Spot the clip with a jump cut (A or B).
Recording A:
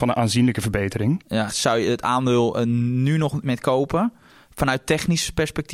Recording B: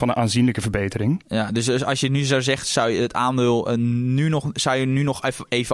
A